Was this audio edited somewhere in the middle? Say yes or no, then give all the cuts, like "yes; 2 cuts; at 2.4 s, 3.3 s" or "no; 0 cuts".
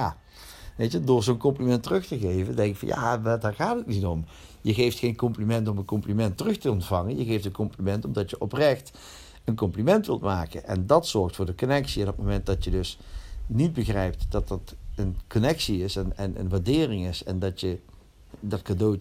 no; 0 cuts